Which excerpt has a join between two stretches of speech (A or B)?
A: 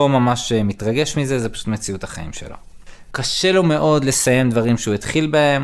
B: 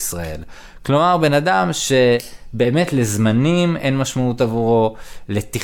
A